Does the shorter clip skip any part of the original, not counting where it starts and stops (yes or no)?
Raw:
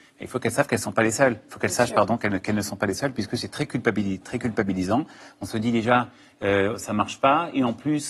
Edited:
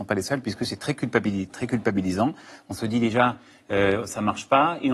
no